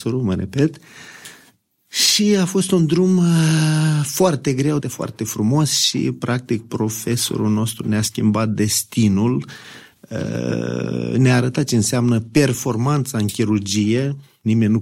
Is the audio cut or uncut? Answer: cut